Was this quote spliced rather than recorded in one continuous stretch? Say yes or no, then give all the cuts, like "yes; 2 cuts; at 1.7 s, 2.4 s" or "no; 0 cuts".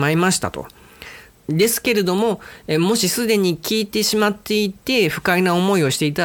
yes; 1 cut; at 1.4 s